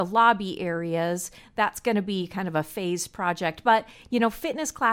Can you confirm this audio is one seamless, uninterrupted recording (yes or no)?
yes